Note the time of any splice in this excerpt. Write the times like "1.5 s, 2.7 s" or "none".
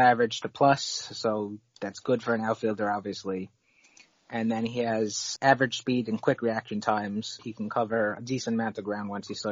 5.4 s, 7.4 s